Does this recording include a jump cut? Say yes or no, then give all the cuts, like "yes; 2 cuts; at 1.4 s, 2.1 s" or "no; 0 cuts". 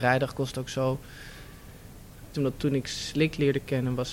yes; 1 cut; at 2.3 s